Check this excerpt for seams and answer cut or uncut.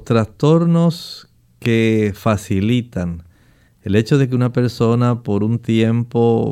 uncut